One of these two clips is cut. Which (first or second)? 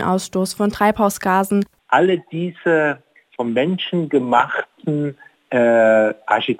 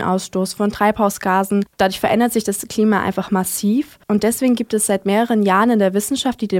first